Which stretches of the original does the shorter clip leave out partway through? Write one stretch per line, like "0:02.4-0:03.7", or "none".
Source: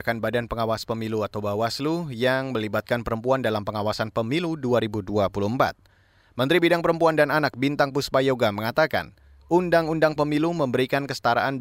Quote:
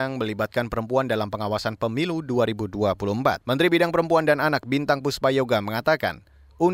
0:05.8-0:06.3